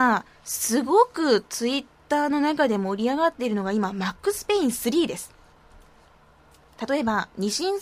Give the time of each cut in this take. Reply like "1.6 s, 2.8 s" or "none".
none